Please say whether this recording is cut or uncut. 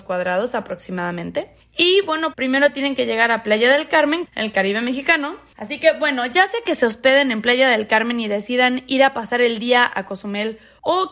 cut